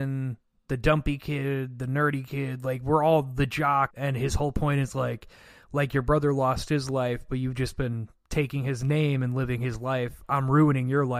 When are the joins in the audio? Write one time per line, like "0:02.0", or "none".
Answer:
0:03.9